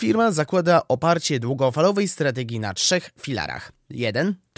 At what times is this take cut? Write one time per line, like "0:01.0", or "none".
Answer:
none

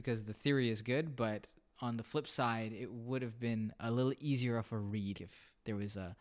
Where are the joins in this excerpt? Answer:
0:05.1

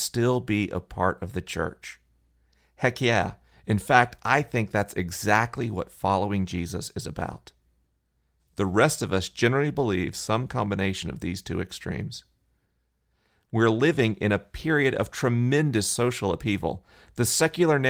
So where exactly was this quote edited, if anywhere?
0:08.4

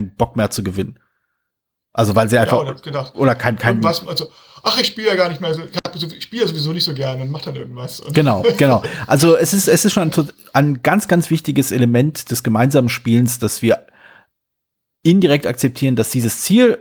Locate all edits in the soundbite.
none

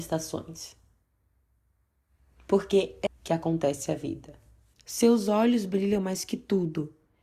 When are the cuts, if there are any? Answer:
0:03.1
0:04.7

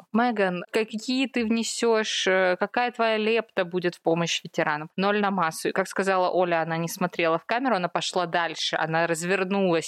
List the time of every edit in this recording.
none

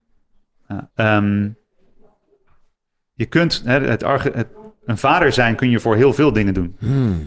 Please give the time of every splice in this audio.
0:00.9

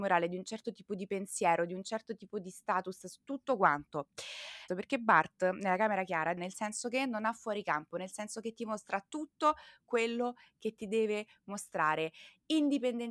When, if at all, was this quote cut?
0:04.7
0:06.4

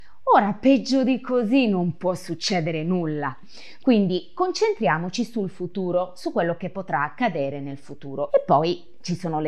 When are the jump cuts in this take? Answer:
0:08.3

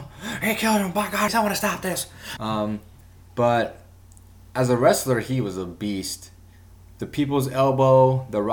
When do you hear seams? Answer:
0:01.3
0:02.4

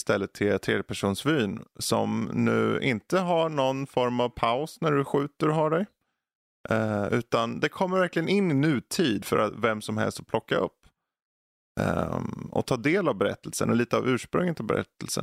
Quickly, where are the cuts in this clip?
0:09.2

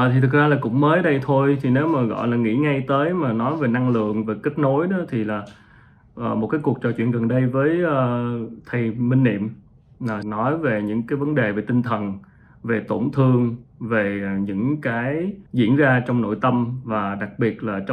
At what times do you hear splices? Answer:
0:10.2
0:15.5

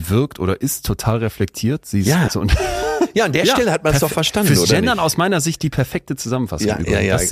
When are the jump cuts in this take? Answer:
0:02.3

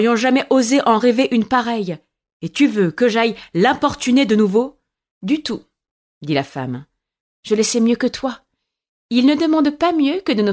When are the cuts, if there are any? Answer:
0:05.1

